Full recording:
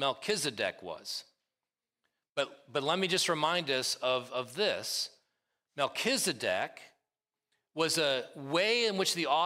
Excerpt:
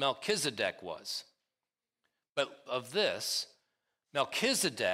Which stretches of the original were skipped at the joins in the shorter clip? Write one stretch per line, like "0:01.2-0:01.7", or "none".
0:02.7-0:04.3